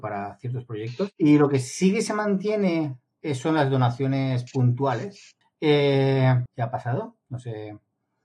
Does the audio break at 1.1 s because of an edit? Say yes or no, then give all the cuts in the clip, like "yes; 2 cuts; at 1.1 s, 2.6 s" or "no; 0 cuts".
no; 2 cuts; at 5.4 s, 6.5 s